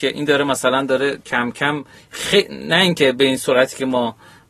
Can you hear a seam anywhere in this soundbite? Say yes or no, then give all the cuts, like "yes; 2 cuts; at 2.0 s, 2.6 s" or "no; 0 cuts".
no; 0 cuts